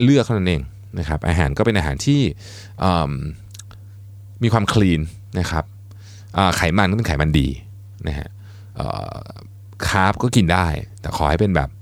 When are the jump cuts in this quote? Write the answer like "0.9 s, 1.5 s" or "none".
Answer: none